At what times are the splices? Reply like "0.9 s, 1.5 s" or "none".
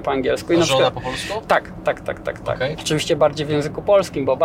2.8 s

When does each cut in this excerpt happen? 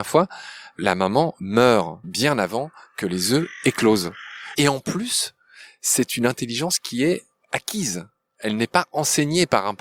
2.0 s, 4.5 s

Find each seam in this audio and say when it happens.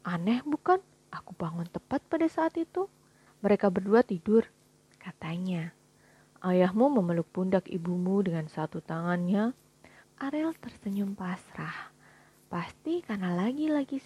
3.3 s, 10.0 s

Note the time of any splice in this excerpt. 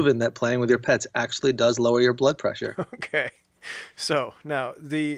none

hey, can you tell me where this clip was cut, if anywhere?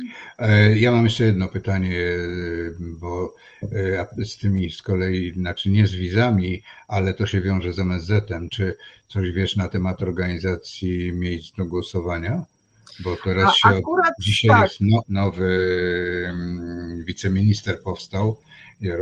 8.5 s, 15.0 s

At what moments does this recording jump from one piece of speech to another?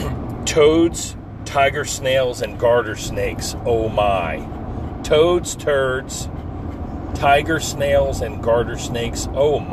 1.4 s

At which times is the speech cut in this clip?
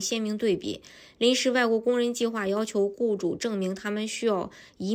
none

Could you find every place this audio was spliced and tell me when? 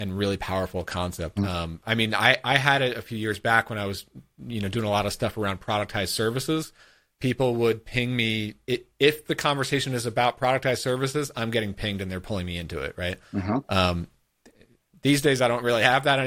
1.4 s

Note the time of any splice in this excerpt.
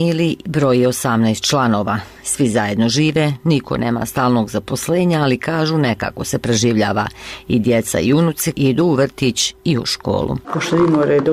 8.5 s

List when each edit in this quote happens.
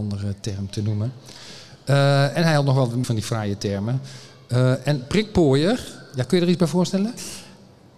3.0 s

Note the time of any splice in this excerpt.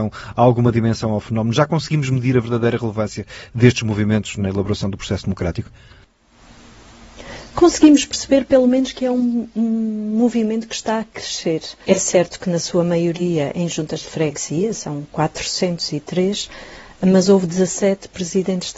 11.8 s

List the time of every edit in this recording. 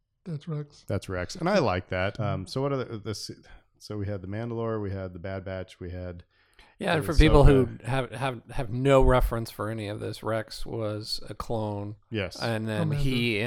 2.2 s

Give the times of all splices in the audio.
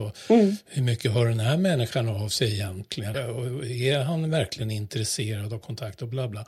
3.1 s

